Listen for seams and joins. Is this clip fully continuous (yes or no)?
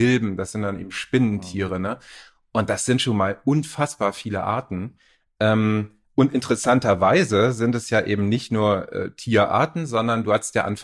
yes